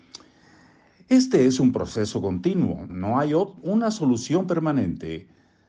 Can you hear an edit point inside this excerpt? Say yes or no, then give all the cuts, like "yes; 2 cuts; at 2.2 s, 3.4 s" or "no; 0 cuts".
yes; 1 cut; at 2.9 s